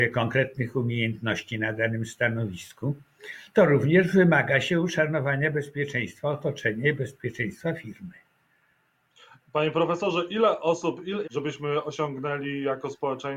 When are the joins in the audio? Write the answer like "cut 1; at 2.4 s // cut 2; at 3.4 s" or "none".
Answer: cut 1; at 11.2 s